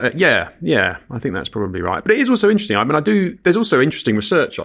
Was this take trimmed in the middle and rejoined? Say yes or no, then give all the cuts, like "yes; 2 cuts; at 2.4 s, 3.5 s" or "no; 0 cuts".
no; 0 cuts